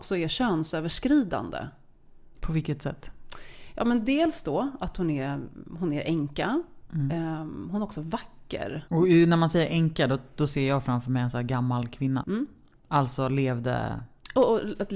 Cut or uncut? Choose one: cut